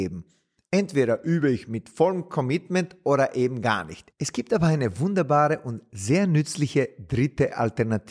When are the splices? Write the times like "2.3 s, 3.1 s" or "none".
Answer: 4.1 s

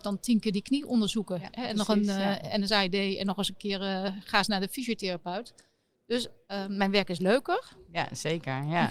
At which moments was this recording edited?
none

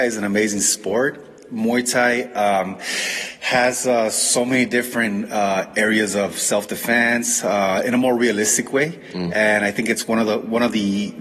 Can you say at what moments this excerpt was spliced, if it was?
none

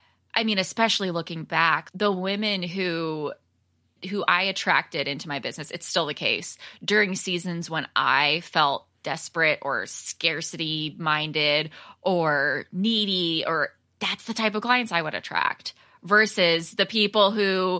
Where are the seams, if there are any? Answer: none

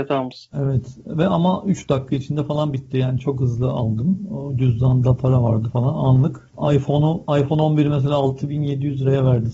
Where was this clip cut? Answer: none

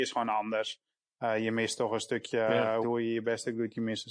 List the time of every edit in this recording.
2.8 s

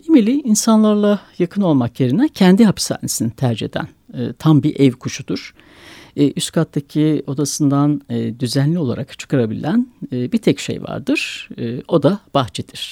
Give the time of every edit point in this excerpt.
none

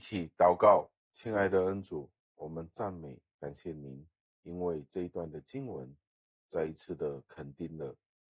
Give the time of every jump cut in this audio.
1.0 s

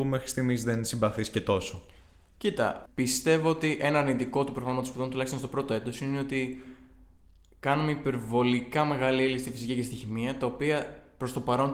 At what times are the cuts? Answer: 2.9 s

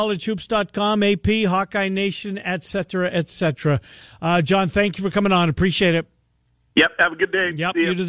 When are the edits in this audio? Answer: none

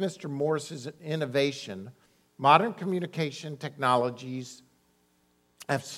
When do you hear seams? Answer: none

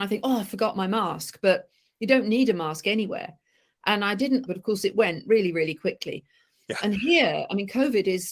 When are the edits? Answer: 4.5 s

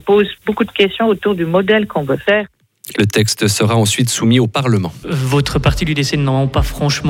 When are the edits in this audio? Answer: 2.9 s, 5.0 s

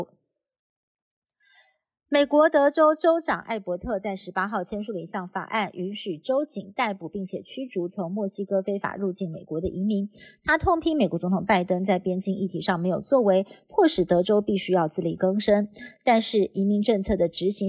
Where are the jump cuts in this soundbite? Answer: none

